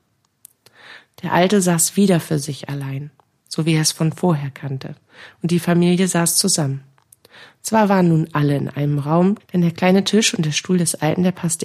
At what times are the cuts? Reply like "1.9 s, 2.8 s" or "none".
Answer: 9.4 s